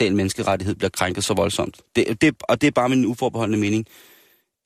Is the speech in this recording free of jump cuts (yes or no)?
yes